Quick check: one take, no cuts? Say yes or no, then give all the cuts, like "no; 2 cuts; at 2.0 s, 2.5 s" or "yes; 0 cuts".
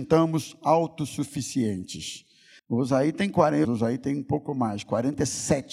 no; 2 cuts; at 2.6 s, 3.6 s